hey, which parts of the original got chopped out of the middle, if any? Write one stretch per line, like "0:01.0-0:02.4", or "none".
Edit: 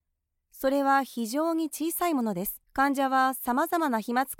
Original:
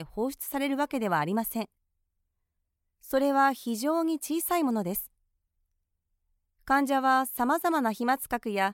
0:05.1-0:06.6